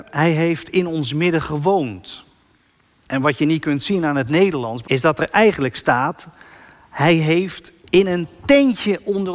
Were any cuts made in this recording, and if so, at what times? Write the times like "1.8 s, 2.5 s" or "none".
4.8 s